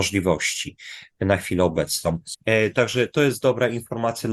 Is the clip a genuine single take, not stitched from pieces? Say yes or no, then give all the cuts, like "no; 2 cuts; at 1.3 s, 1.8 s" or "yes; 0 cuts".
no; 1 cut; at 2.3 s